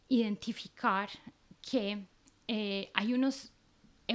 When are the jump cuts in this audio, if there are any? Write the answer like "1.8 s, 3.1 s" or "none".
none